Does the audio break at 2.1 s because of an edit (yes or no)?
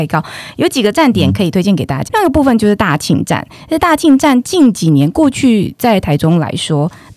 yes